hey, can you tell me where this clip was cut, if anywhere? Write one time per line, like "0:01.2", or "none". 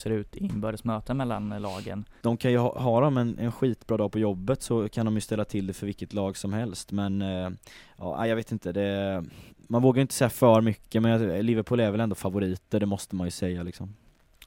0:02.2